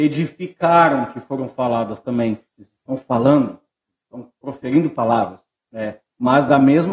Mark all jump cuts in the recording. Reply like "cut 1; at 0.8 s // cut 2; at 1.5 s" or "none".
cut 1; at 2.5 s // cut 2; at 5.6 s